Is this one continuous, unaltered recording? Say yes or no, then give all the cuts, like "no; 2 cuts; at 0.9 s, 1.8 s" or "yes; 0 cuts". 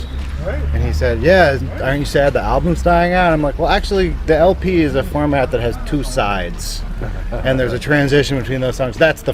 yes; 0 cuts